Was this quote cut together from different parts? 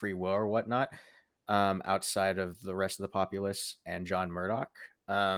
no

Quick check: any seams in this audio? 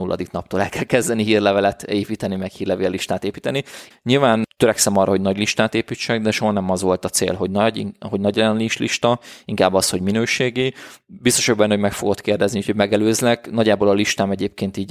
yes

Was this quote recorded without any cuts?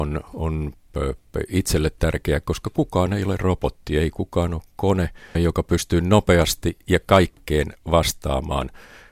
no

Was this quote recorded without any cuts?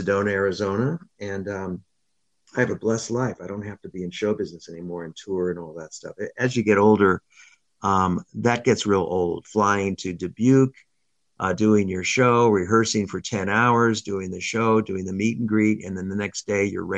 yes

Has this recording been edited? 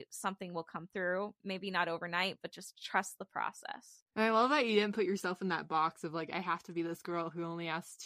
no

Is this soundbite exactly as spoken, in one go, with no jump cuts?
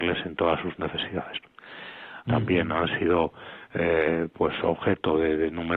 no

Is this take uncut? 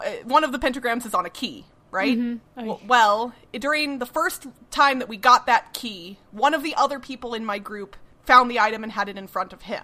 no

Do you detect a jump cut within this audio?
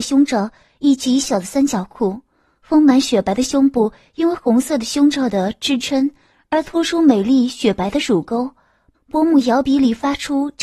yes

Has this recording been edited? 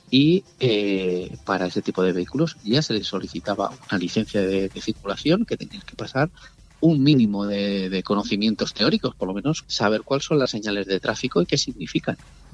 yes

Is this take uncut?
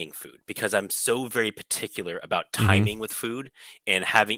yes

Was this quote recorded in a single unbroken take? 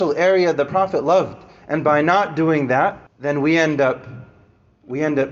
no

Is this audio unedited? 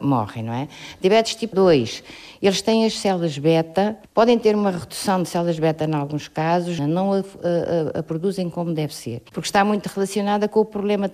no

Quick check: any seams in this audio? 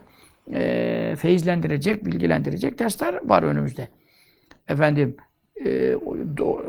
no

